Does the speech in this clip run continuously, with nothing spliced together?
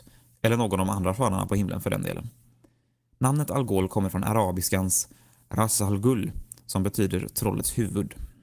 yes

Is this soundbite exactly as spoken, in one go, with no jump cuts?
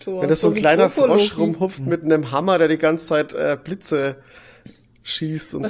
yes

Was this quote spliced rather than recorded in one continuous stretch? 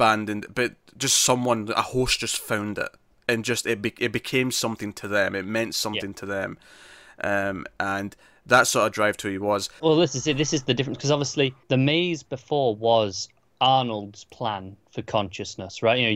yes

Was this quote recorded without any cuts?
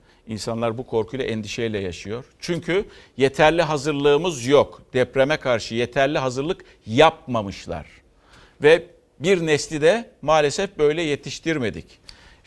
yes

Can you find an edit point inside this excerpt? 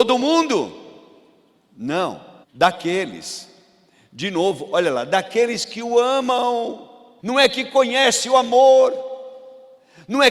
yes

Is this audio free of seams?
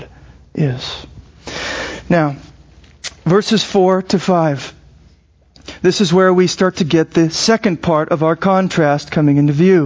yes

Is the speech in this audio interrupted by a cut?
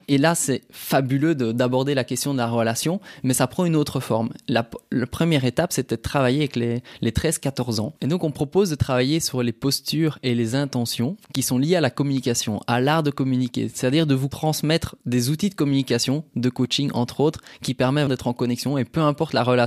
yes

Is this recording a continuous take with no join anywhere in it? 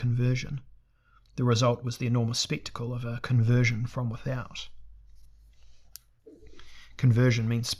yes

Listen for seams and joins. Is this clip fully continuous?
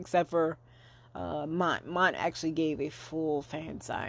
yes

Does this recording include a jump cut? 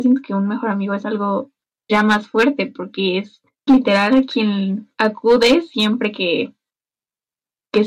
yes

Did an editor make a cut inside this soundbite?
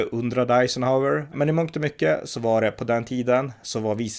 yes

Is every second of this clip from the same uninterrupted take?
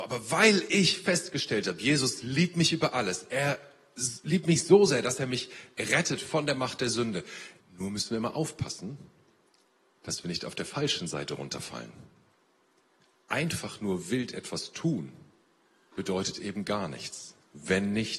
no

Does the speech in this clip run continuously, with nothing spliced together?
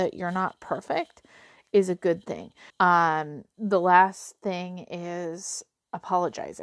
no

